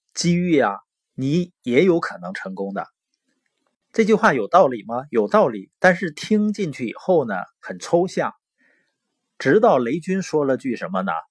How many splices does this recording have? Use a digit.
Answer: 0